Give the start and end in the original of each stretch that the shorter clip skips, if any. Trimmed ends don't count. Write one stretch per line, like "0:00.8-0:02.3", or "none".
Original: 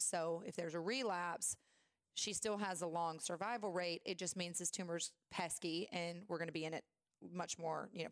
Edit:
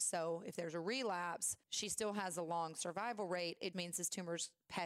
0:01.6-0:02.1
0:04.2-0:04.3